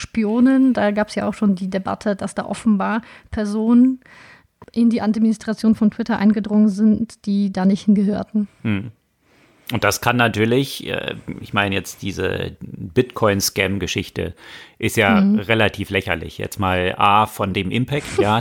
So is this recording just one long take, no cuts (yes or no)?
no